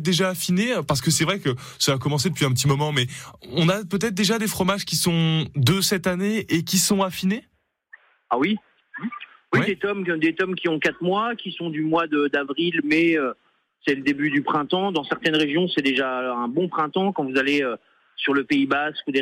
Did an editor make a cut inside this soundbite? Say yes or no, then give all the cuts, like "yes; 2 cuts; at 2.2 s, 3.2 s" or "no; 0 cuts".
no; 0 cuts